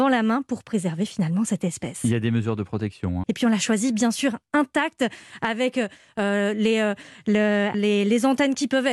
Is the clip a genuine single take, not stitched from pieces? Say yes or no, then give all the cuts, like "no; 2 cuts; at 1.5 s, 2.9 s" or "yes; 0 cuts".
no; 2 cuts; at 3.2 s, 7.7 s